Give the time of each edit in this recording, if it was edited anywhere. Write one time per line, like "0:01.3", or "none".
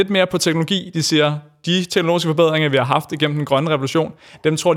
none